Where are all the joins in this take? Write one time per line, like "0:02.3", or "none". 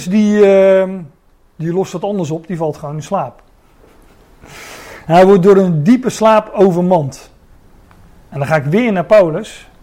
none